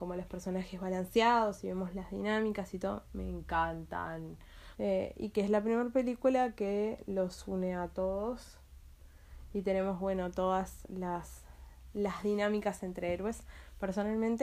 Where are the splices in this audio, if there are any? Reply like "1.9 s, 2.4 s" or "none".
4.7 s